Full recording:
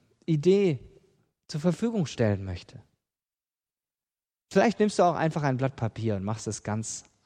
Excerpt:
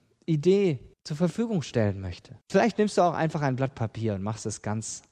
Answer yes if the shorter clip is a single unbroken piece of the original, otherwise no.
no